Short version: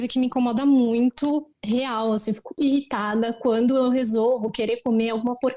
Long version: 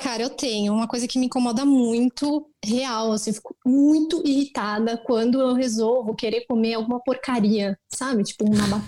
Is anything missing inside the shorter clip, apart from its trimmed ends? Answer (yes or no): yes